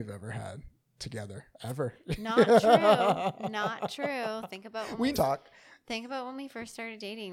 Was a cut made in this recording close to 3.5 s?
no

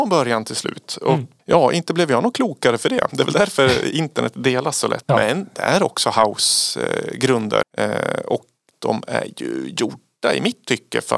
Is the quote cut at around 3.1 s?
no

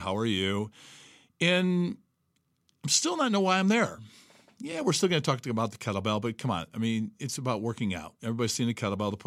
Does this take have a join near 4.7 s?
no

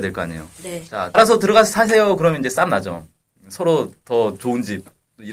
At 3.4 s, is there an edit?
no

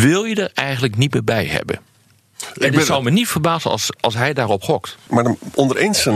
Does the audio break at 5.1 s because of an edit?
yes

